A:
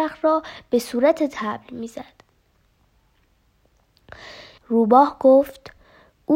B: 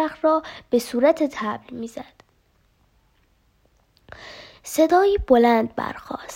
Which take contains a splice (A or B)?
A